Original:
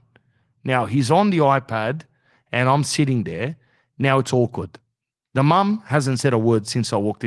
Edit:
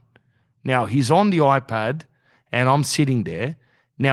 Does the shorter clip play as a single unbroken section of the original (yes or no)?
yes